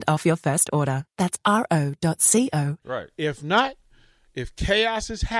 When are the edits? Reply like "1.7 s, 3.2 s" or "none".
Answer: 2.8 s

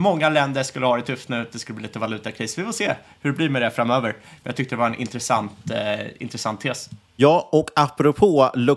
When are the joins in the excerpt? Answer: none

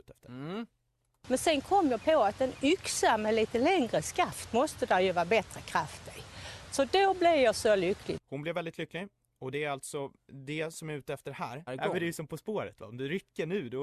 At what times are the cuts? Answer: 8.2 s, 11.7 s

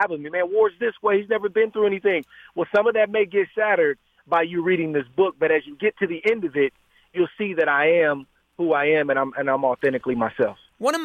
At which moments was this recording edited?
none

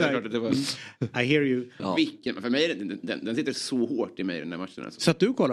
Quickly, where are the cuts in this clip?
1.8 s

